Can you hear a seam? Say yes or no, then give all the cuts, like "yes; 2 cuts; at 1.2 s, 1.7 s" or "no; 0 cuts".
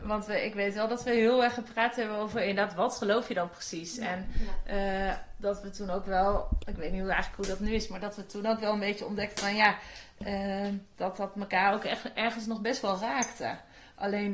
no; 0 cuts